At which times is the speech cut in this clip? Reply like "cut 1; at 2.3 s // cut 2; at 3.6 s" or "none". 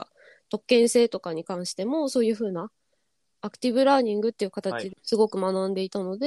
cut 1; at 4.9 s